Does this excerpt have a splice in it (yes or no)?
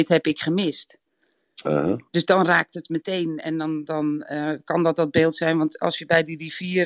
yes